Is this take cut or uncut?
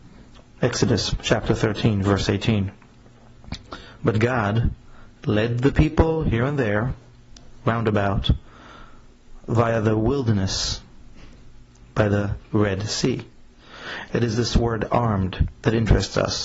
cut